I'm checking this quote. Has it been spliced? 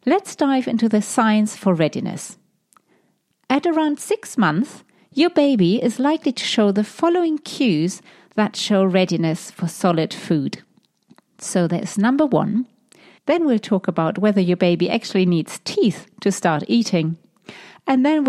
yes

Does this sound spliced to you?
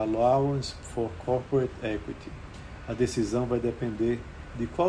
no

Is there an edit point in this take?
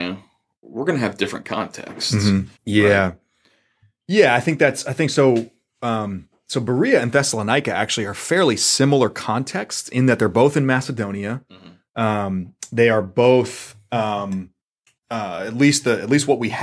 yes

